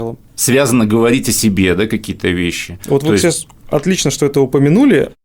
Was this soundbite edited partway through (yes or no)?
no